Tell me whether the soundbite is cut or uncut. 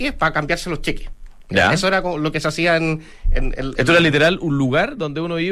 uncut